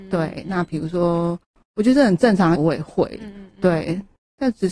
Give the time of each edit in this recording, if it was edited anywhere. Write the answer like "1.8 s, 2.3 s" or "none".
2.6 s